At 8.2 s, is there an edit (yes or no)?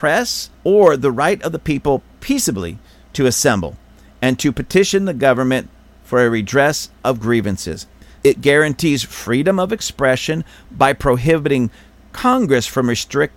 yes